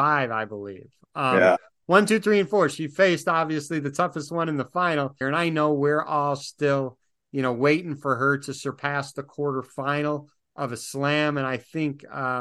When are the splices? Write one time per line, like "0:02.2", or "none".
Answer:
0:05.2